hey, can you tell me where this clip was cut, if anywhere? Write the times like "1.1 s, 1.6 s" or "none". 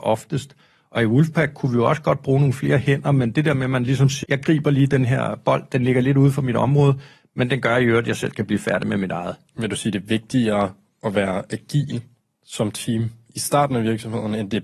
4.2 s, 9.5 s